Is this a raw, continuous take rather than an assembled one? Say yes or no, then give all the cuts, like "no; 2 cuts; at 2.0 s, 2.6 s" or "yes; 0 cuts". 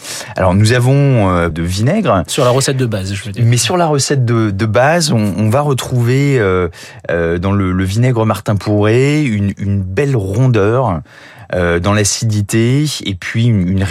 no; 1 cut; at 1.5 s